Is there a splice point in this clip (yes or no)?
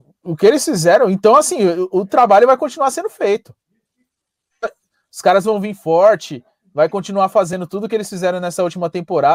no